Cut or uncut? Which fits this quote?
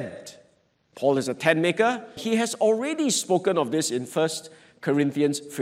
cut